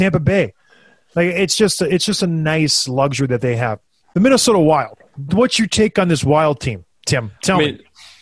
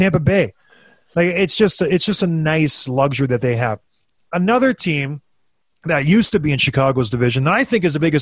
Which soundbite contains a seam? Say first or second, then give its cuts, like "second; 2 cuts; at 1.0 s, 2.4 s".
first; 2 cuts; at 4.0 s, 6.9 s